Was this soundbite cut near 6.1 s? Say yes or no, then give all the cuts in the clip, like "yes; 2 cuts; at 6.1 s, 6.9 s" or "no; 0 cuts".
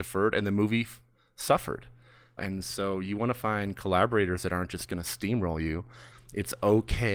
yes; 1 cut; at 6.1 s